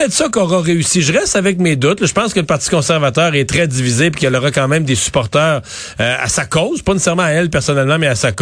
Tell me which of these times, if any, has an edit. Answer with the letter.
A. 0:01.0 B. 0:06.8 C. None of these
C